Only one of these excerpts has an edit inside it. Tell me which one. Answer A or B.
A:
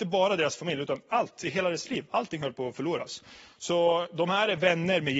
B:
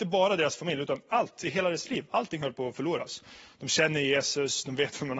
B